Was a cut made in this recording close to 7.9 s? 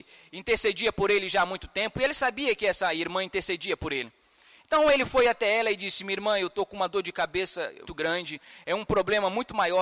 yes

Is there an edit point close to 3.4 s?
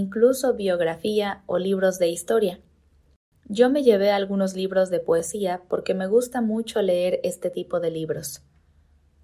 no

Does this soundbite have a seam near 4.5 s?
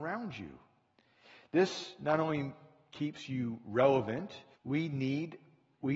yes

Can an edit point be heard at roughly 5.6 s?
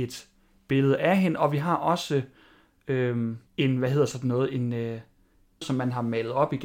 yes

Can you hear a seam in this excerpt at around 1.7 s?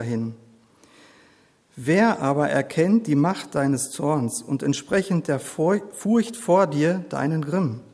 no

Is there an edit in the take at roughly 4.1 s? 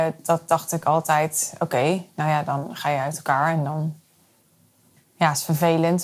no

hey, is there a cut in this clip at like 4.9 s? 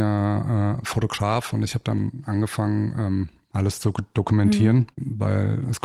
yes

